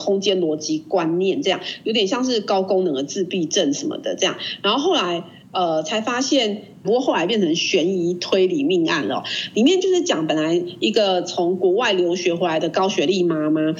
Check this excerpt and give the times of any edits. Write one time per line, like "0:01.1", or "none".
0:06.8